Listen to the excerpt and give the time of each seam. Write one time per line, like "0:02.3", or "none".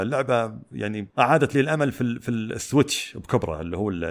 0:01.1